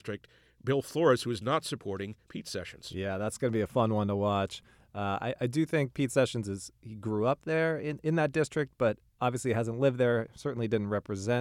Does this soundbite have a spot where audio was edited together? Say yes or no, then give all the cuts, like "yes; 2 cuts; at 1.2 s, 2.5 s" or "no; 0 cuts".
no; 0 cuts